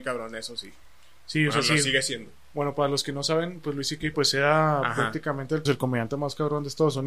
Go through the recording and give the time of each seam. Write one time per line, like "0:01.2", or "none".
0:02.5
0:04.1
0:05.7